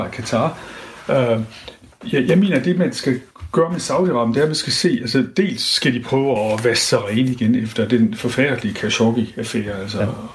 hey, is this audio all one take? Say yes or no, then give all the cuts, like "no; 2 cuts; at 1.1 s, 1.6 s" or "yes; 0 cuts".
no; 1 cut; at 6.4 s